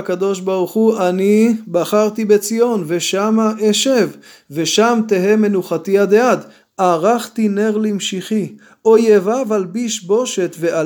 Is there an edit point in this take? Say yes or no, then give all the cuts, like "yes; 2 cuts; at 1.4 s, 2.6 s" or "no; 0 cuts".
yes; 1 cut; at 6.6 s